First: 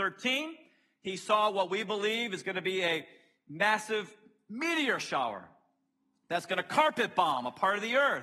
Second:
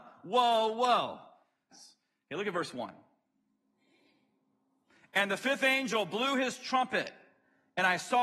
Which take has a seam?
second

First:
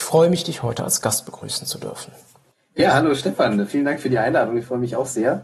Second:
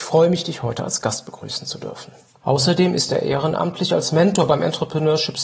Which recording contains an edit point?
second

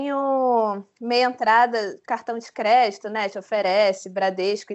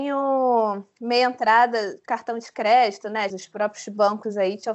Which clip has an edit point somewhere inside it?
second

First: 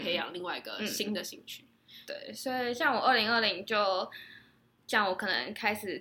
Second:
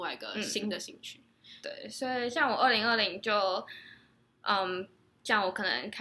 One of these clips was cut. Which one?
first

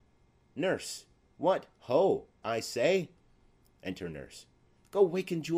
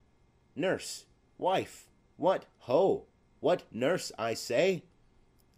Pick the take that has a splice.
first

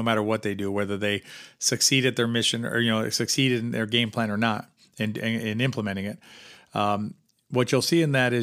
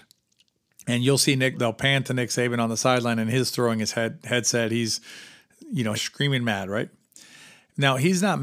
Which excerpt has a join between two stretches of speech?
second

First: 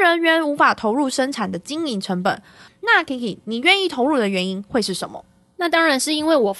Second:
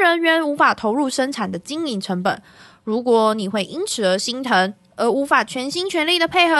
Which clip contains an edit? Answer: first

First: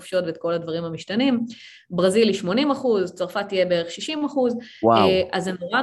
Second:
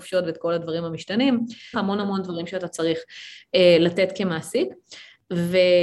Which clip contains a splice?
second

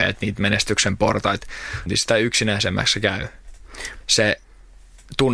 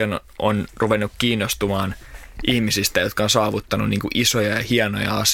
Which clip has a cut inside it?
first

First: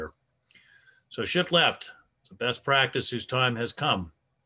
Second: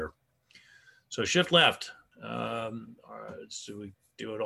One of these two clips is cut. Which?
second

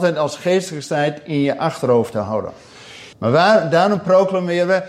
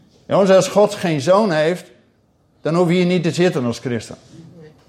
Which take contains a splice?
first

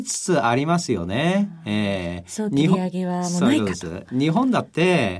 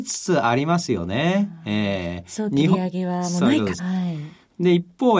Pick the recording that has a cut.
second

